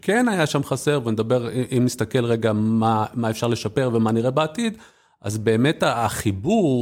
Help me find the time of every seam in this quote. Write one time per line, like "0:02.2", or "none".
none